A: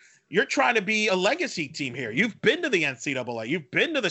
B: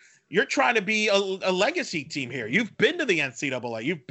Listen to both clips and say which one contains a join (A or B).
A